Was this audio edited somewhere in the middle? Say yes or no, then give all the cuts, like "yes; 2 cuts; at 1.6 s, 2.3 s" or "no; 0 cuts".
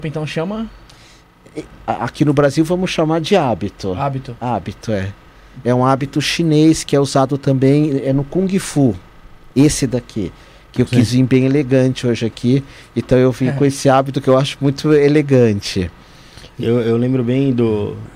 yes; 1 cut; at 5.6 s